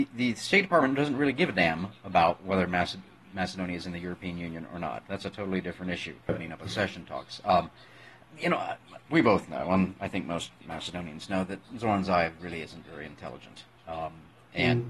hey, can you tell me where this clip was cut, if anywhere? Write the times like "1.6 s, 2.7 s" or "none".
6.3 s, 9.1 s